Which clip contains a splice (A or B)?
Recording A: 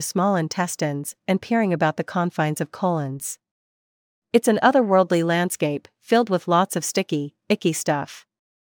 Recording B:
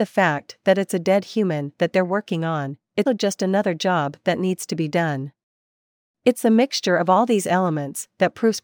B